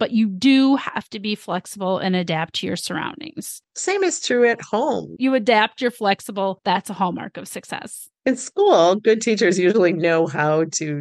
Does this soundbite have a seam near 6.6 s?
no; 2 cuts; at 3.6 s, 5.2 s

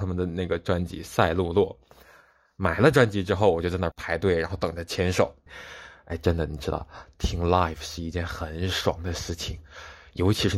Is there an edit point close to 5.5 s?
yes; 2 cuts; at 3.9 s, 5.5 s

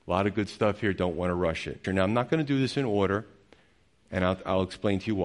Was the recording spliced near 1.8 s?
yes; 1 cut; at 1.8 s

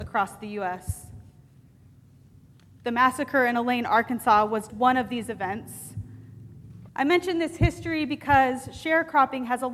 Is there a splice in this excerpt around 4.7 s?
yes; 2 cuts; at 4.7 s, 6.9 s

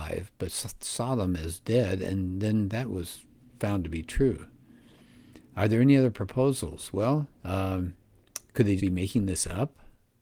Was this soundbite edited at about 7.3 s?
yes; 2 cuts; at 7.3 s, 8.8 s

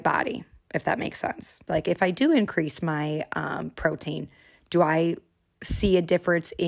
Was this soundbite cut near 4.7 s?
no; 1 cut; at 1.7 s

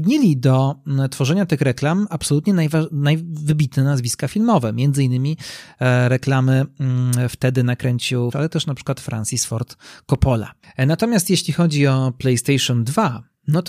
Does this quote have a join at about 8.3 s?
yes; 1 cut; at 8.3 s

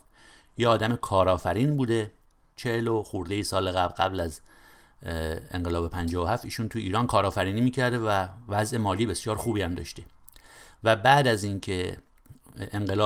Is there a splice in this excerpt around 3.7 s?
no; 0 cuts

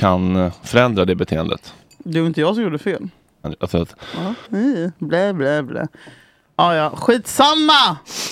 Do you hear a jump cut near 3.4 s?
yes; 2 cuts; at 3.4 s, 4.5 s

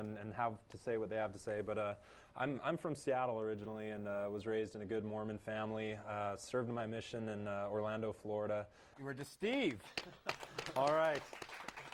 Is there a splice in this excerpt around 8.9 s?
yes; 1 cut; at 8.9 s

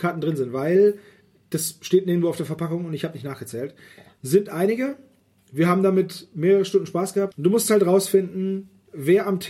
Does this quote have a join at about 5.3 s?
no; 1 cut; at 7.3 s

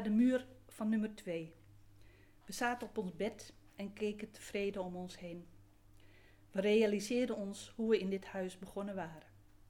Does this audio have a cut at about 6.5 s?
no; 0 cuts

